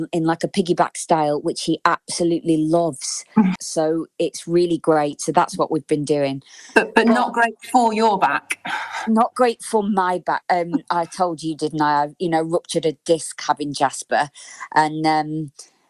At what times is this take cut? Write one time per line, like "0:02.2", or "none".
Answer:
0:03.6
0:10.4